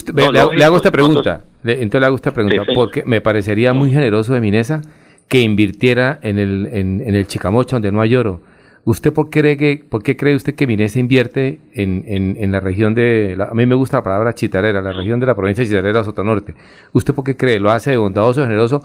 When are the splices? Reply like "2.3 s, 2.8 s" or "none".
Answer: none